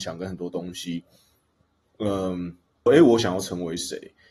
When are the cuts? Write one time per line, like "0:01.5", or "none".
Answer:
0:02.9